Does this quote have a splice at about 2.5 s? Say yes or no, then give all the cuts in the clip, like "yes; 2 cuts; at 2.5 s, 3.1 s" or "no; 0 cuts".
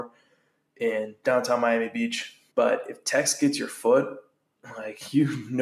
yes; 1 cut; at 2.5 s